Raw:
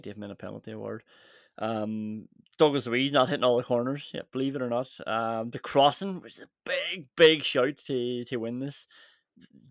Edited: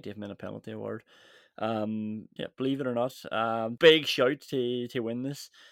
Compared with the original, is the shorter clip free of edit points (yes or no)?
no